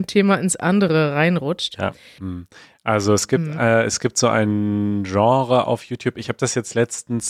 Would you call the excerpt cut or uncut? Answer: cut